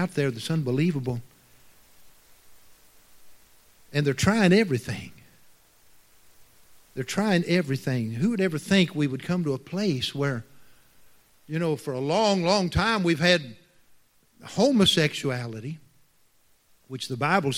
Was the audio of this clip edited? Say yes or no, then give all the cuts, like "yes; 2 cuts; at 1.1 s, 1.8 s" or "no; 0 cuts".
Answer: no; 0 cuts